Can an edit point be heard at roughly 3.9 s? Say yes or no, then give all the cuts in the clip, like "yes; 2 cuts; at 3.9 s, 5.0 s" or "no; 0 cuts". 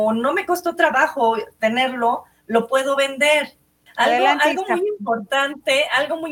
yes; 1 cut; at 3.9 s